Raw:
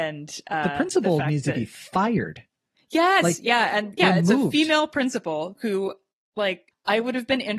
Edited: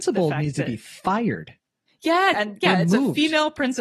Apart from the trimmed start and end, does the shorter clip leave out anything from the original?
yes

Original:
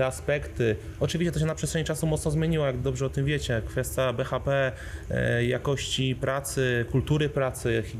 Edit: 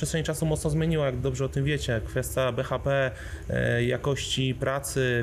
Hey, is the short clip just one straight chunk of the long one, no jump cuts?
yes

